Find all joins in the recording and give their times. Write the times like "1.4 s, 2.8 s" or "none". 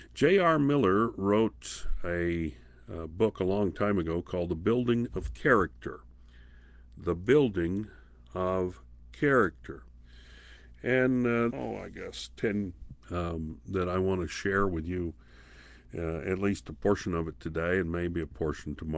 11.5 s, 13.0 s